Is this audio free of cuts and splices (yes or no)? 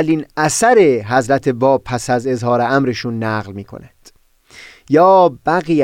yes